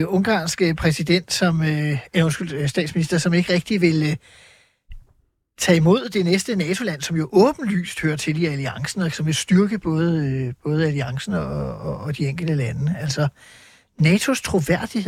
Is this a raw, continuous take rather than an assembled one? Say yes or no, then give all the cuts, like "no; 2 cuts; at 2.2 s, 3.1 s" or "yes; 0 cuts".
yes; 0 cuts